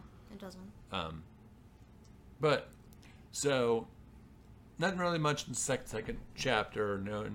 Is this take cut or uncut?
uncut